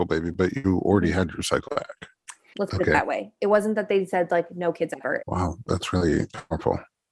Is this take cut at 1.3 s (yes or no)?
no